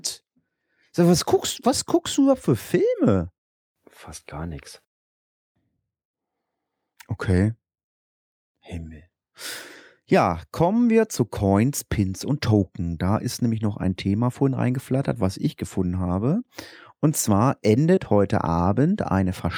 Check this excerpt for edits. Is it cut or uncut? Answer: uncut